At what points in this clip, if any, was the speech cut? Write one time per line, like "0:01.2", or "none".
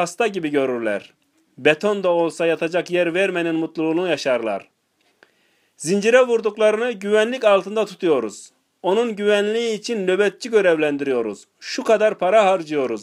none